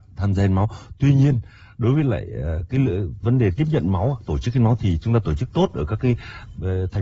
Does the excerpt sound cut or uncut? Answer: uncut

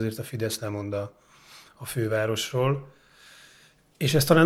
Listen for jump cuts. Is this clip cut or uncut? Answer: uncut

